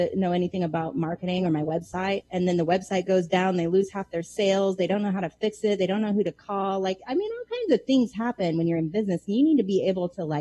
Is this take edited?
no; 0 cuts

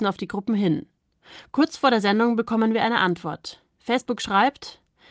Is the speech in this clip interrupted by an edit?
no; 0 cuts

